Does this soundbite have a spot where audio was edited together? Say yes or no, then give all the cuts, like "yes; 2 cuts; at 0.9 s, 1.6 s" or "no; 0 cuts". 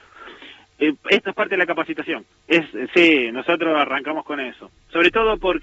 yes; 1 cut; at 2.3 s